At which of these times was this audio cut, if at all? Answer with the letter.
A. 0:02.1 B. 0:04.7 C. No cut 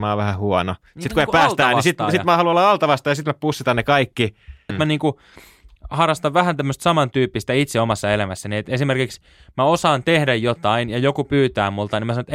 B